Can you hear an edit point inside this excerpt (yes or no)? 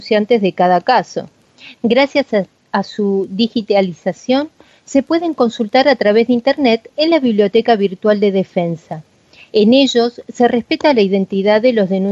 yes